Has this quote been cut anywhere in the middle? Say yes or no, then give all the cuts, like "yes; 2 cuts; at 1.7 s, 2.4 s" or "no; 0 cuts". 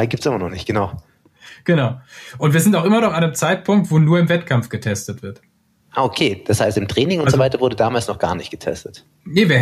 no; 0 cuts